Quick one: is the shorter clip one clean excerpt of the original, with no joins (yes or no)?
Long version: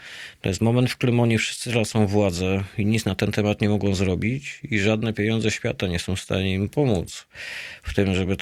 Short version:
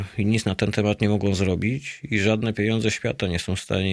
yes